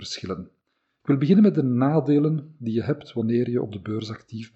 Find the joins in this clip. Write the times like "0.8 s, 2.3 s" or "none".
1.0 s